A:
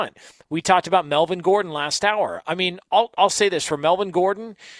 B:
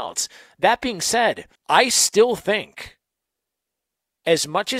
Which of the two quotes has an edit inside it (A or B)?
B